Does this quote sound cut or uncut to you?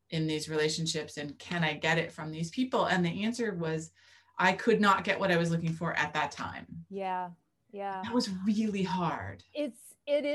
uncut